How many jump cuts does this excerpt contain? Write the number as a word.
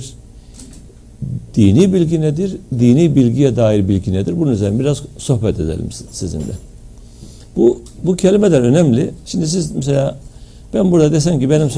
one